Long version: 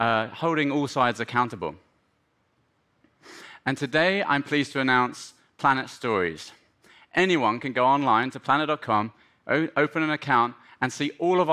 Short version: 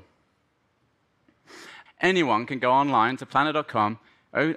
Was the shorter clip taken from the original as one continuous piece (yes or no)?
no